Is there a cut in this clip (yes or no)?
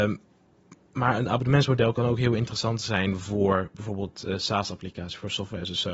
no